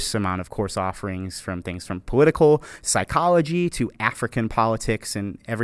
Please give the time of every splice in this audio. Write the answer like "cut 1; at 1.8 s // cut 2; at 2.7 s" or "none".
cut 1; at 2.0 s